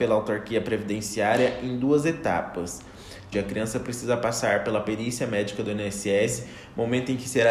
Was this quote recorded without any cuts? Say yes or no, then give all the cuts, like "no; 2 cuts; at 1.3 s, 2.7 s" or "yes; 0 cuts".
no; 1 cut; at 3.3 s